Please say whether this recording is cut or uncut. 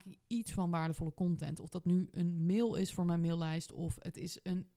uncut